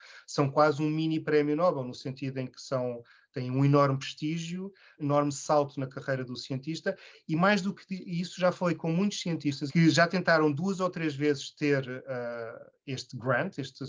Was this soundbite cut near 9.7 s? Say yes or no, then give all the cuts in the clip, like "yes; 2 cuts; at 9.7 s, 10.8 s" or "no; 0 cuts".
yes; 2 cuts; at 5.0 s, 9.7 s